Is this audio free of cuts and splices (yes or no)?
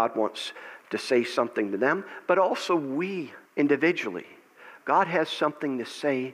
no